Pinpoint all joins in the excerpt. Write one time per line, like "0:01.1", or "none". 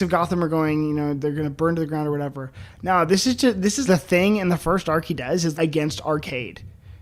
0:03.9
0:05.5